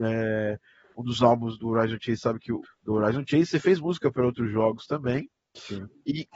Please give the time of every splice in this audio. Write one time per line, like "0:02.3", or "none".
0:01.6
0:02.6